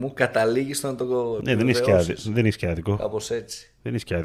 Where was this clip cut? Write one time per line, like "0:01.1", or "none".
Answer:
none